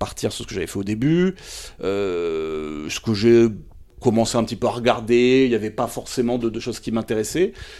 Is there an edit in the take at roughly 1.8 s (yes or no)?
no